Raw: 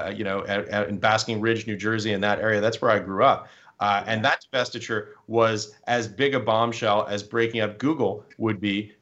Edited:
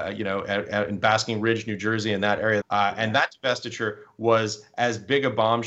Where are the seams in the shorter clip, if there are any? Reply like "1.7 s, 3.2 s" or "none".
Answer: 2.6 s